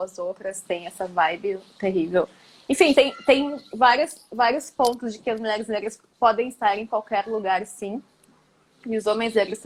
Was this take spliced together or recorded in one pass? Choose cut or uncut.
uncut